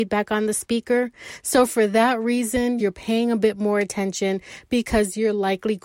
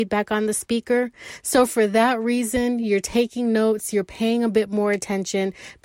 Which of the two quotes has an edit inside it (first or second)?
first